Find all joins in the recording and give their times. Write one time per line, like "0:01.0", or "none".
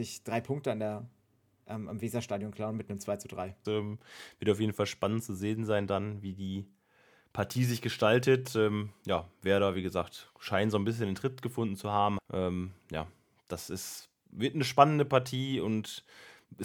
0:03.6
0:12.2